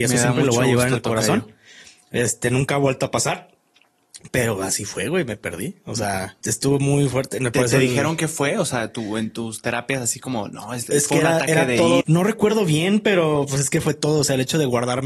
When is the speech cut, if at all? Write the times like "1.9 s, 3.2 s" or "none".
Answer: 6.4 s, 12.0 s